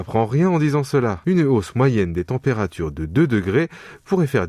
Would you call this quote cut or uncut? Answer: cut